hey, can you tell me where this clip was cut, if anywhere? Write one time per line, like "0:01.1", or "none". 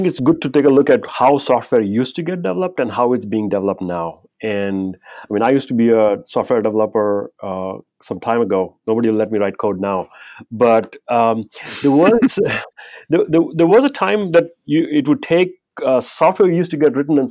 none